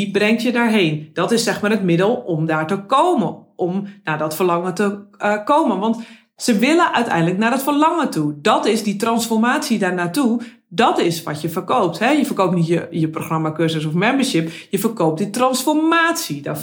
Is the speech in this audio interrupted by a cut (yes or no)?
no